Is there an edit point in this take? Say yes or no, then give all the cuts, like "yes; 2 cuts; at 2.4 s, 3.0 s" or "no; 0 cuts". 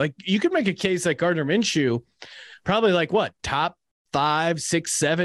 no; 0 cuts